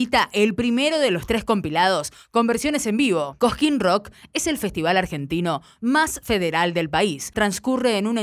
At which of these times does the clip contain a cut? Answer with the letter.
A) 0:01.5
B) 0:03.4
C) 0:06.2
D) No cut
D